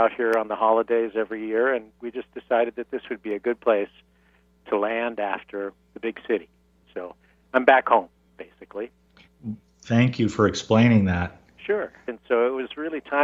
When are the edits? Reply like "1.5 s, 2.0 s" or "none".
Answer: 12.1 s